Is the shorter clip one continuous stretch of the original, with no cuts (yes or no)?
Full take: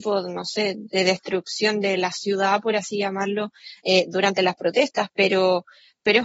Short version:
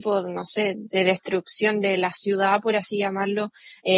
yes